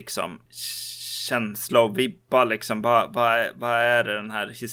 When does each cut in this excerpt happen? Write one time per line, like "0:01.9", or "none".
none